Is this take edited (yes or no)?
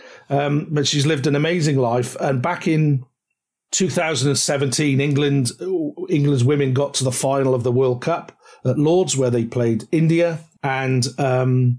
no